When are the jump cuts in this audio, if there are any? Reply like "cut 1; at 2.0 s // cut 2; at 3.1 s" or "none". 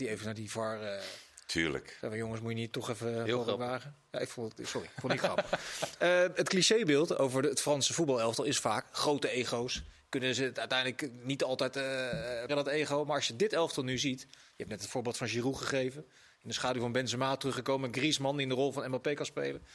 cut 1; at 12.5 s